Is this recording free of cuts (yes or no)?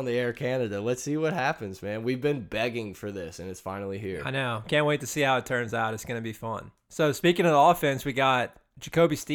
yes